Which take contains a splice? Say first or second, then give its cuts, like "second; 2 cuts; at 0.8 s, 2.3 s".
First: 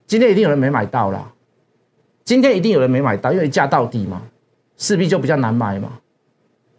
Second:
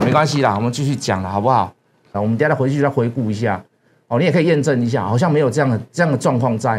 second; 1 cut; at 2.1 s